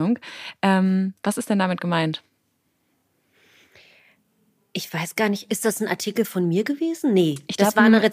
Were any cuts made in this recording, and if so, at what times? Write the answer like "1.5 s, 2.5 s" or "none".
none